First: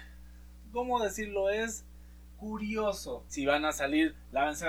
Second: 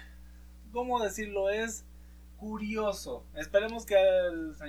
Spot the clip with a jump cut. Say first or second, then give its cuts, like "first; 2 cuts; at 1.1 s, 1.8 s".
first; 1 cut; at 3.3 s